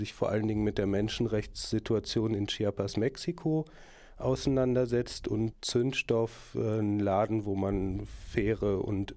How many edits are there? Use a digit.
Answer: 1